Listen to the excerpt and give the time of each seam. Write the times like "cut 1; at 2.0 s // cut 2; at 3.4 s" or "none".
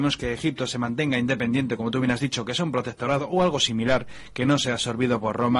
none